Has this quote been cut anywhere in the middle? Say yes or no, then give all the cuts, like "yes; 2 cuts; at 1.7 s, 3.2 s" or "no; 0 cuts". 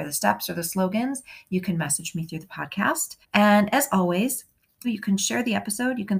yes; 2 cuts; at 3.2 s, 4.8 s